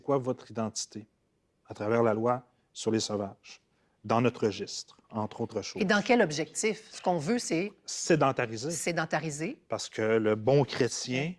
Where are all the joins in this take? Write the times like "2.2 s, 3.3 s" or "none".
none

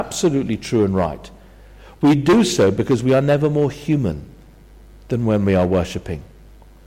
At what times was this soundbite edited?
none

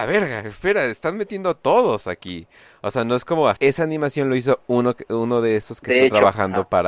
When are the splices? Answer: 3.6 s

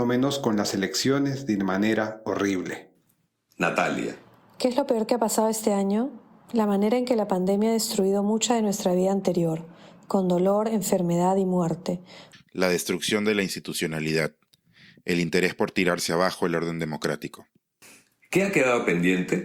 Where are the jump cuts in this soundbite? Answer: 12.3 s

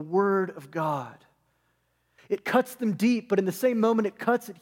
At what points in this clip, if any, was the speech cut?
2.2 s

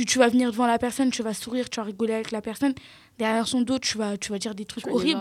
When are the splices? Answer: none

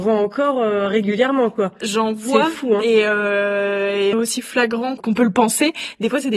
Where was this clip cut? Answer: 4.1 s

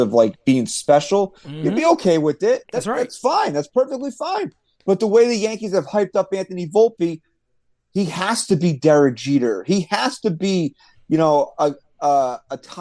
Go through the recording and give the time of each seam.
none

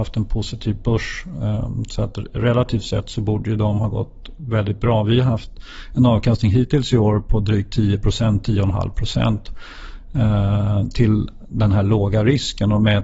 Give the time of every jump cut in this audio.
none

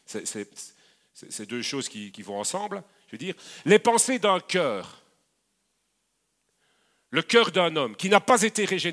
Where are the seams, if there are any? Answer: 2.1 s

